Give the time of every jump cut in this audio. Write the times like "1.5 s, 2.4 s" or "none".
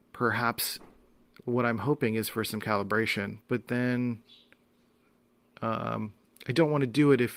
3.4 s